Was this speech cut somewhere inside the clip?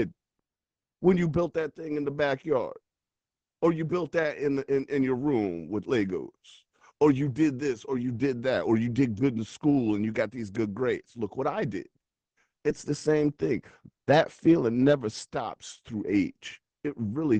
no; 0 cuts

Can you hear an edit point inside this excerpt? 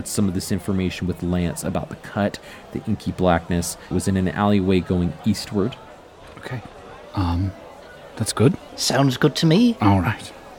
yes; 2 cuts; at 3.9 s, 8.7 s

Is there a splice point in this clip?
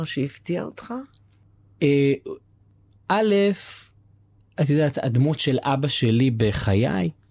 no; 0 cuts

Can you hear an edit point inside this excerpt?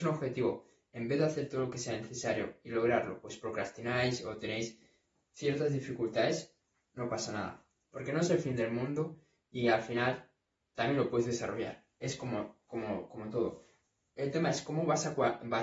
yes; 1 cut; at 10.6 s

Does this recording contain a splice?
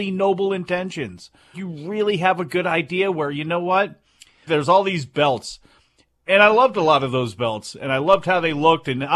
yes; 2 cuts; at 1.5 s, 4.5 s

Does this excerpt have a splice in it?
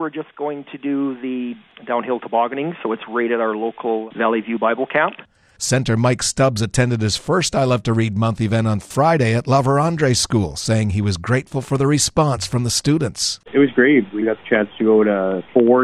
yes; 1 cut; at 5.6 s

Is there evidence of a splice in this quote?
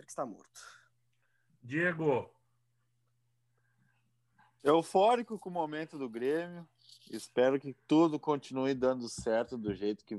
no; 0 cuts

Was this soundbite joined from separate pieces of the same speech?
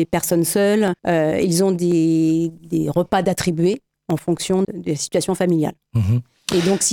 yes; 3 cuts; at 1.0 s, 2.6 s, 4.6 s

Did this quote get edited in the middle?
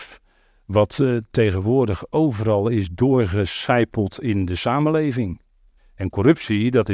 yes; 1 cut; at 5.8 s

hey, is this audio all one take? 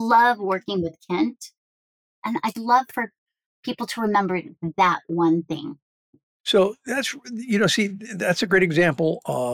yes; 0 cuts

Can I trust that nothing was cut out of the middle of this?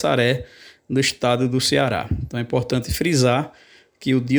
yes; 0 cuts

